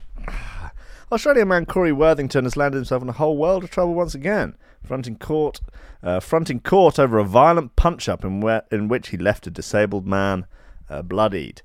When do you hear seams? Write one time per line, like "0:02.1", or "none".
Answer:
none